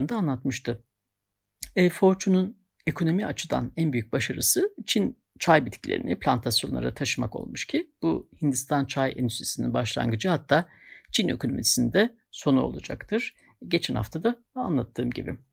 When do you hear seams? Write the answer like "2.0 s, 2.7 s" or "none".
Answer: none